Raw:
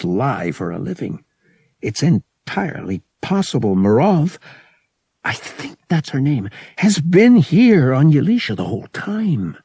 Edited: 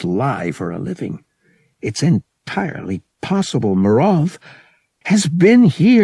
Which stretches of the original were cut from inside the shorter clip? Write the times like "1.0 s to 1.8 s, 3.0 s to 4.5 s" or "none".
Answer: 5.0 s to 6.7 s